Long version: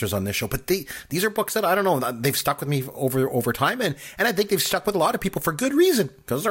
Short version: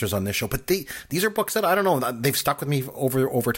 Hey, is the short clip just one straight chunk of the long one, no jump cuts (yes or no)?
yes